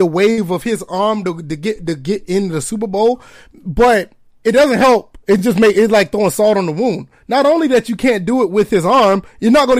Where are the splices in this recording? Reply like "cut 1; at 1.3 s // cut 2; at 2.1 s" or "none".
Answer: none